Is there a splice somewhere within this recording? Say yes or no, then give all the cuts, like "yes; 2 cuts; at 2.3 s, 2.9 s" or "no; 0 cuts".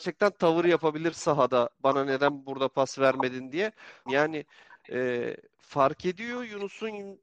yes; 1 cut; at 4.1 s